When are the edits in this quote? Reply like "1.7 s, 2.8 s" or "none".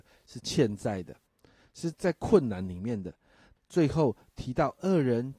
1.9 s, 3.6 s

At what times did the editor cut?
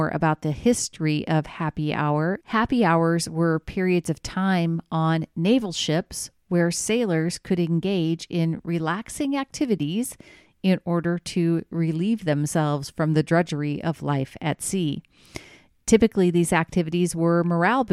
2.4 s

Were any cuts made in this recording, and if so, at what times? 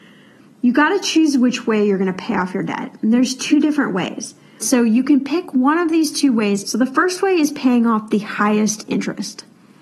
4.6 s, 6.6 s

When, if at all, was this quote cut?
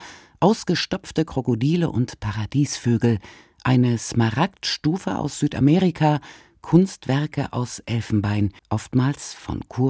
8.6 s

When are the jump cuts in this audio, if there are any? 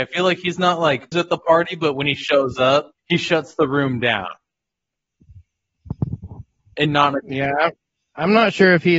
1.1 s, 3.0 s

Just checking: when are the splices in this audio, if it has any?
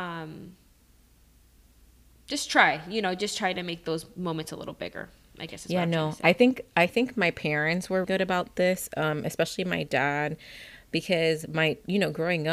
8.0 s

